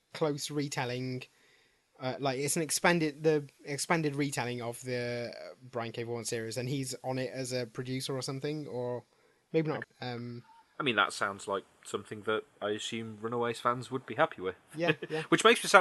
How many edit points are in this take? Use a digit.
1